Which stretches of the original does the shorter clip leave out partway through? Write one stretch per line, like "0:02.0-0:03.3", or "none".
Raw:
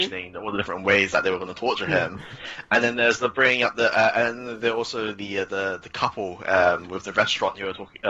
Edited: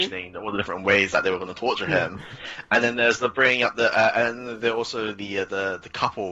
none